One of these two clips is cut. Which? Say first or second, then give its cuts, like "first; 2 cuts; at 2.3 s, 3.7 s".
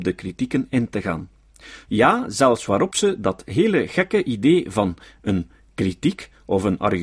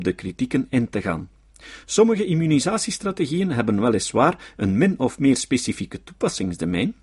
first; 1 cut; at 1.8 s